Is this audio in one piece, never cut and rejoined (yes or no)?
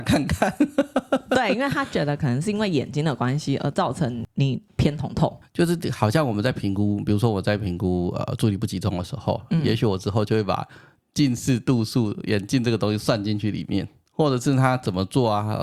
no